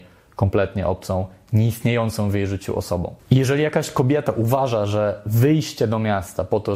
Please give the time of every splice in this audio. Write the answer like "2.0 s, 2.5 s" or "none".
none